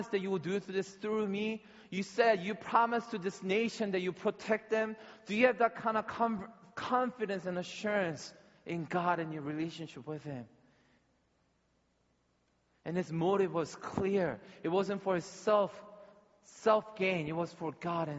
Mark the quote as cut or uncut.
uncut